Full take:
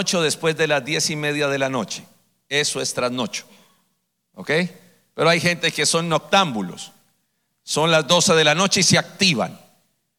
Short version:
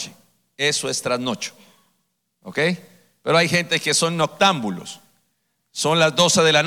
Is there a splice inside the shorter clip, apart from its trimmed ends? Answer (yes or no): no